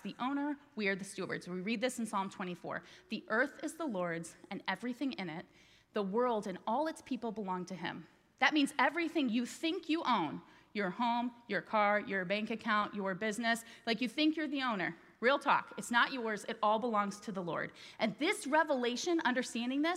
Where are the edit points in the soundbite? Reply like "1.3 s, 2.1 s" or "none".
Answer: none